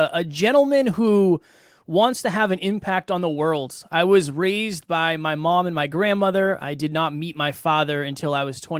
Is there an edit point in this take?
no; 0 cuts

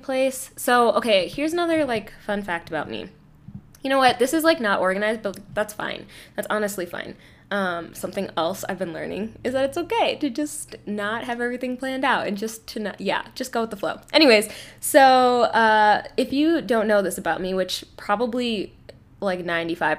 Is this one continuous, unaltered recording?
yes; 0 cuts

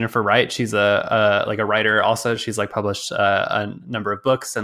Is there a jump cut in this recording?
no; 0 cuts

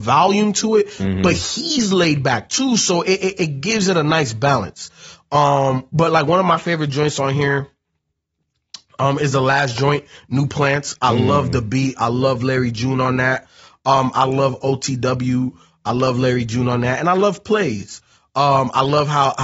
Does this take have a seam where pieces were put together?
no; 0 cuts

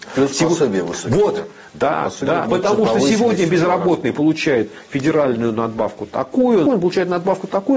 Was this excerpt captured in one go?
no; 2 cuts; at 2.4 s, 6.7 s

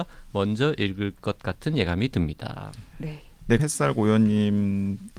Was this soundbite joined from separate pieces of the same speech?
yes; 1 cut; at 3.6 s

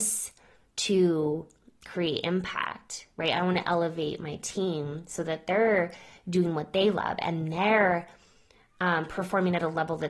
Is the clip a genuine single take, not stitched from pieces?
yes; 0 cuts

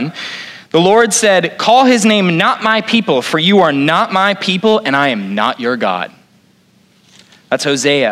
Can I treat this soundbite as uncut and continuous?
yes; 0 cuts

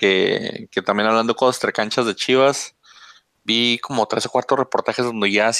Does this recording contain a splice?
no; 0 cuts

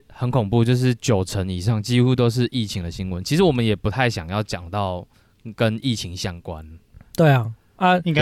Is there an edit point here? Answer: no; 0 cuts

